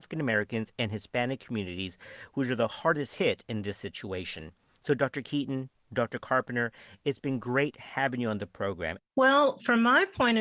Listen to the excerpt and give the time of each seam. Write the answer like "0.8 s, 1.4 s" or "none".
9.0 s